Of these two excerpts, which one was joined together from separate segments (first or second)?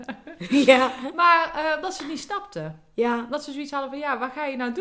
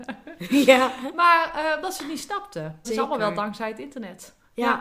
second